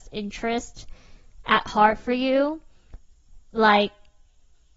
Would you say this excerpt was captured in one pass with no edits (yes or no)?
yes